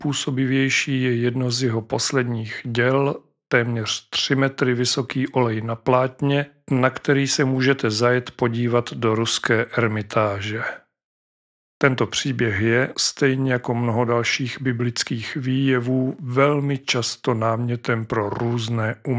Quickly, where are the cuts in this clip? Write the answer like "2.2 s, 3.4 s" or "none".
11.5 s, 12.9 s